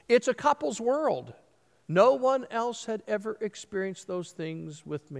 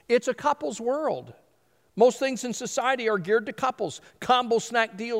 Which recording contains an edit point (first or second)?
first